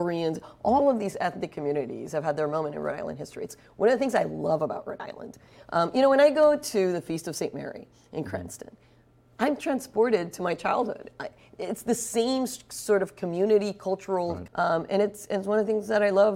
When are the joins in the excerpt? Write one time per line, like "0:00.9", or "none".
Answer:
0:14.5